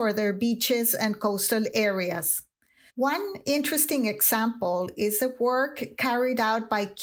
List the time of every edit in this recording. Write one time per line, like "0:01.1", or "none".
0:02.9